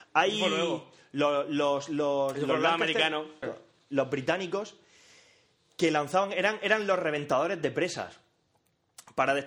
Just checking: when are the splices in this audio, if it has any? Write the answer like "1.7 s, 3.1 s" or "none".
3.4 s